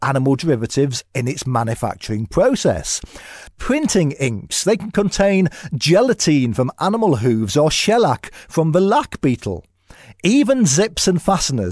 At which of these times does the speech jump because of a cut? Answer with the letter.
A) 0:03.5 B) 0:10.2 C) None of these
A